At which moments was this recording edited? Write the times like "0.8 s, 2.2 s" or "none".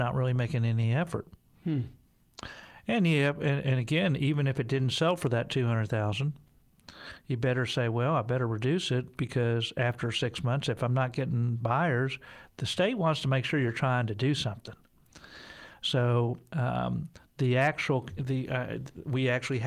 none